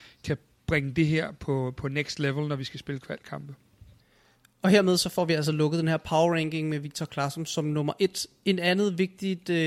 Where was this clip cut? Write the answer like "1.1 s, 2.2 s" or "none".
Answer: none